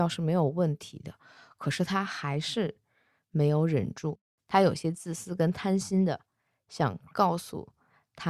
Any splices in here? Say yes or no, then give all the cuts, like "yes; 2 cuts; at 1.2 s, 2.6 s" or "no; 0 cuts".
no; 0 cuts